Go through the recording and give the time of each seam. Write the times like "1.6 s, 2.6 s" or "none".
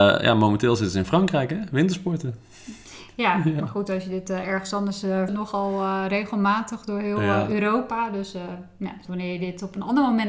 5.3 s, 9.0 s